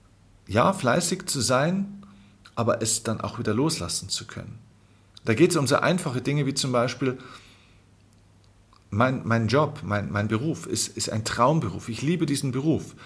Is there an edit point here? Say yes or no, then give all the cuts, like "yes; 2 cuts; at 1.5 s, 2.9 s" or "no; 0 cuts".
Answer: no; 0 cuts